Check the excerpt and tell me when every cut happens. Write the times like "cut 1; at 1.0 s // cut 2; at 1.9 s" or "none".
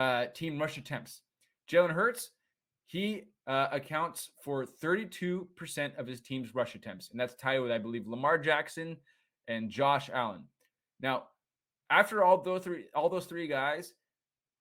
none